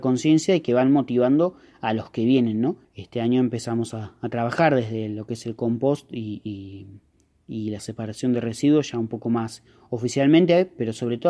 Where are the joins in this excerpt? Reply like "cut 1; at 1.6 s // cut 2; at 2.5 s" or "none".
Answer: cut 1; at 2.8 s